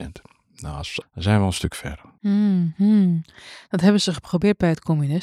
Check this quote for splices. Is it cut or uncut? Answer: cut